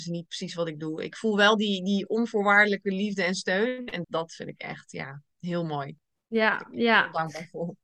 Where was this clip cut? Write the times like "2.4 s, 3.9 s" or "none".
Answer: 4.0 s